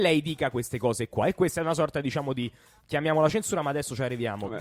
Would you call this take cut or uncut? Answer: uncut